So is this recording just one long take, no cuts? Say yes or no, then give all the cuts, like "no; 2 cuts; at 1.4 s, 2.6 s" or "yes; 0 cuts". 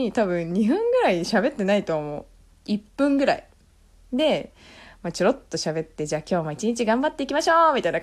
yes; 0 cuts